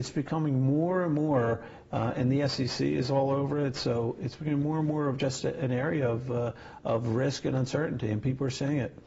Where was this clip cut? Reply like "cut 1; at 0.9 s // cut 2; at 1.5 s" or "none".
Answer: none